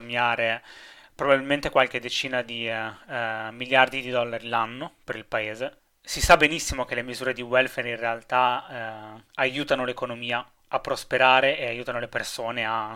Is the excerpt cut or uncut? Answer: uncut